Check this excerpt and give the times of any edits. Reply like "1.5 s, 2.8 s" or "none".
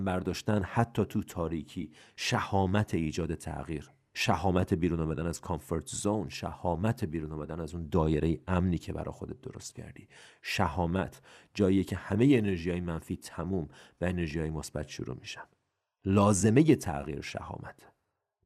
none